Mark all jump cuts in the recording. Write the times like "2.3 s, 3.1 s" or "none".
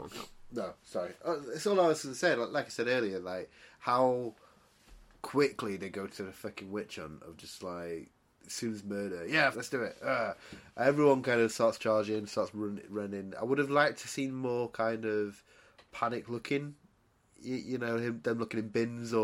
9.5 s